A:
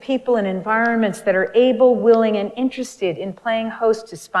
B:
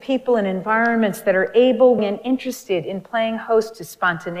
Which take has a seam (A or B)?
B